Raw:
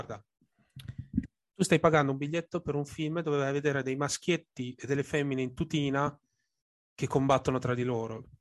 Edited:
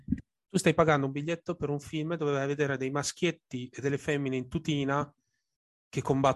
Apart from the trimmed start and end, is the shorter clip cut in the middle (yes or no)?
no